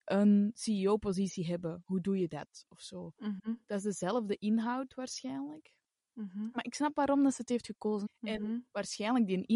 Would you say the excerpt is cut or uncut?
cut